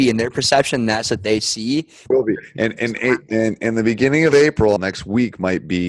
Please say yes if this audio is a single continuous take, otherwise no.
no